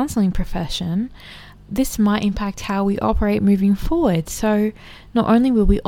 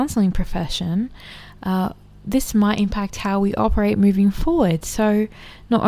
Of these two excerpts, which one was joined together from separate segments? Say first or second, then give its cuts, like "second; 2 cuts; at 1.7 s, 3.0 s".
first; 1 cut; at 1.6 s